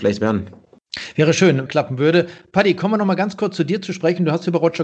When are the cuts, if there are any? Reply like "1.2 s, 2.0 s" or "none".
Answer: 1.7 s